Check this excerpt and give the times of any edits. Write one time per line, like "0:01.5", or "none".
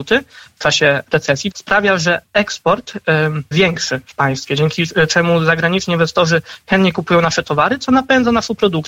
0:01.5
0:03.5